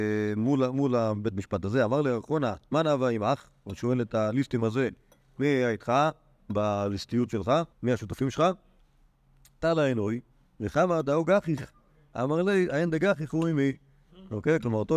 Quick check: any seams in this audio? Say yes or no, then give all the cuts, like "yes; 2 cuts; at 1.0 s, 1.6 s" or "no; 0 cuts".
yes; 1 cut; at 7.7 s